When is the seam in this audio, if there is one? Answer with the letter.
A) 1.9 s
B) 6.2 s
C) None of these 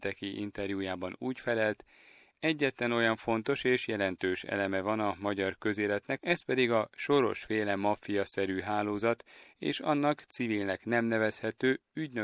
B